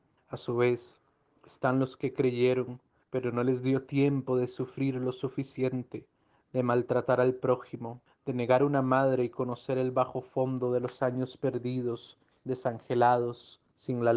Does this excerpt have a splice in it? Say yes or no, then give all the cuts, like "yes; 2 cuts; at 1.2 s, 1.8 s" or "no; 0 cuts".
yes; 2 cuts; at 8.1 s, 12.4 s